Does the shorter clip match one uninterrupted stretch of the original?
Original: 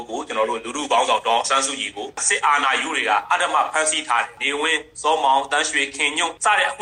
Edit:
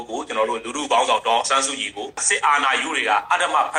yes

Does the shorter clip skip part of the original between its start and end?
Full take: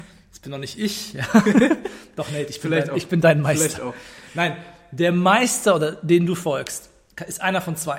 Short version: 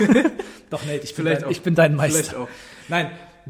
no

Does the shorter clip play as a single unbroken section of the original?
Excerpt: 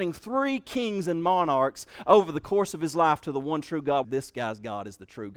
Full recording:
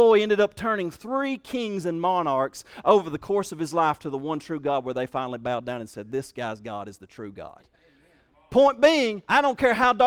no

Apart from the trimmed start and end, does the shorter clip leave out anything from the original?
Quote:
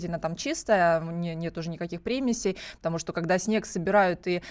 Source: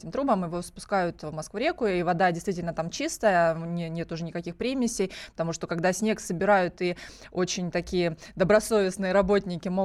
no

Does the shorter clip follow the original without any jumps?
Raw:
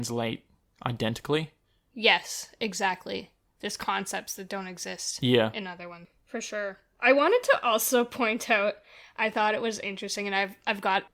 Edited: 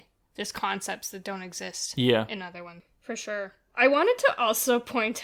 yes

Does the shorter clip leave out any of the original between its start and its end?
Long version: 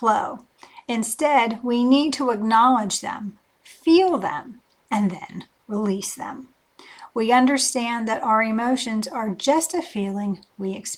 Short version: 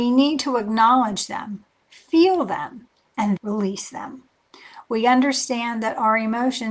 yes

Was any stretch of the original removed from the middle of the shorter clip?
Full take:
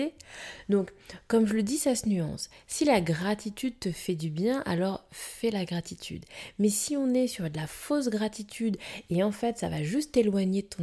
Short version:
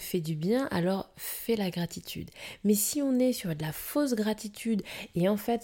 no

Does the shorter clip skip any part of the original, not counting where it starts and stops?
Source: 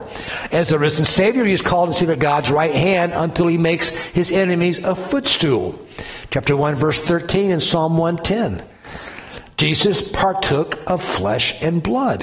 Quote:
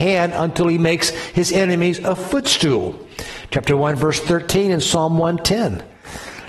no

